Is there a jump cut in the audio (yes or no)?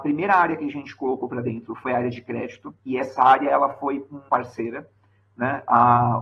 yes